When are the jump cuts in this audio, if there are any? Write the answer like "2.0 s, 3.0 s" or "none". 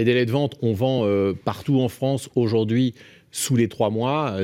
none